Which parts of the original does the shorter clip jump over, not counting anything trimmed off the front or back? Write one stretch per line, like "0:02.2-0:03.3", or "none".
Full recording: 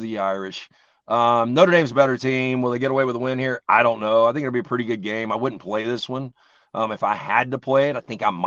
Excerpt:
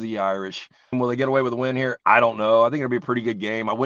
0:00.9-0:02.6